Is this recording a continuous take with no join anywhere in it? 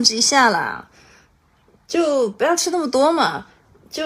yes; 0 cuts

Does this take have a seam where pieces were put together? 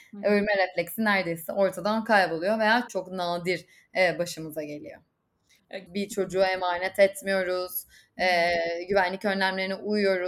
yes; 2 cuts; at 2.9 s, 5.9 s

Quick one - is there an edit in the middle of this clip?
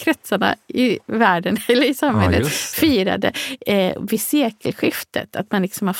no; 0 cuts

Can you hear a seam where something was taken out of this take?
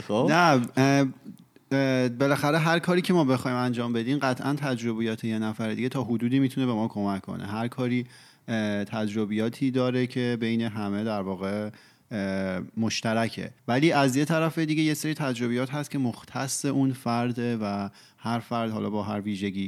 yes; 1 cut; at 13.6 s

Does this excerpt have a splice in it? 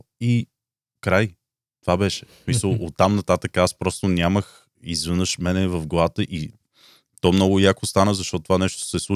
no; 0 cuts

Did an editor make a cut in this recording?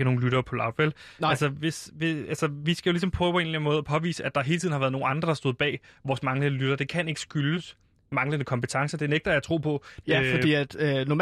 yes; 1 cut; at 10.0 s

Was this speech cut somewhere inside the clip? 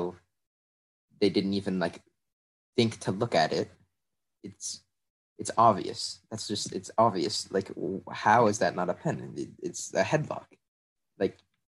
no; 0 cuts

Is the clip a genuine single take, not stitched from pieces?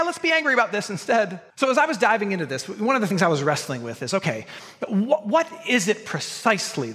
no; 1 cut; at 1.5 s

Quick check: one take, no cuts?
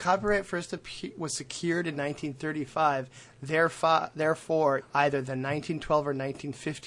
no; 1 cut; at 4.8 s

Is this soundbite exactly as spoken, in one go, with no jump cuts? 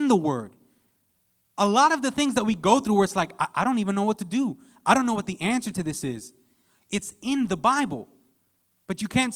yes; 0 cuts

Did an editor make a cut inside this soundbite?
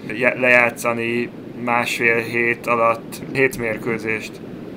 no; 0 cuts

